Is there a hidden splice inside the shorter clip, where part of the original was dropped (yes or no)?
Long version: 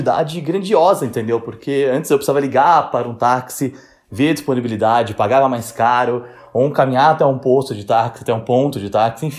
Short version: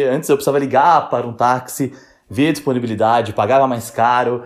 no